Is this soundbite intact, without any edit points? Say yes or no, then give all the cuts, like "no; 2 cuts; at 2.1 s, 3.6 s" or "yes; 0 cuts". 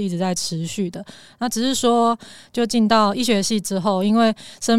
yes; 0 cuts